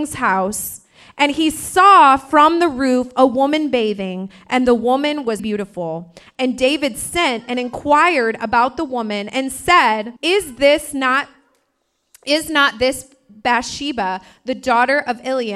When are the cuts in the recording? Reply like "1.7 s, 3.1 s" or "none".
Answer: 5.4 s, 10.2 s